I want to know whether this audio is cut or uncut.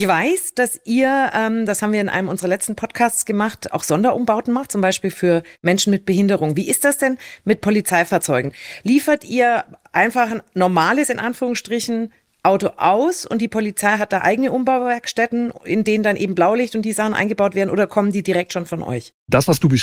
uncut